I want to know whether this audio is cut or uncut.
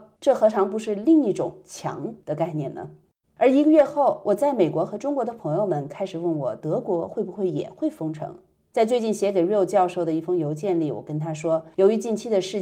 uncut